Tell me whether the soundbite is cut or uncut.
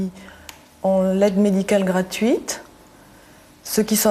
uncut